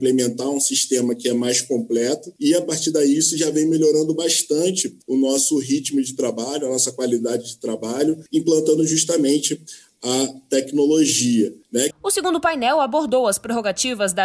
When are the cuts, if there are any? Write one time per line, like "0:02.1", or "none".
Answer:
0:11.9